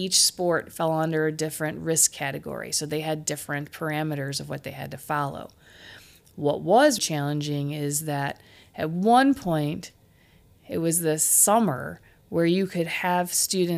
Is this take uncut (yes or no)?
no